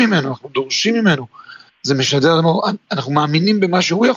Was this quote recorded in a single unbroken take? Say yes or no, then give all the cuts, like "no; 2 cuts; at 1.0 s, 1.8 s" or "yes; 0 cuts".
yes; 0 cuts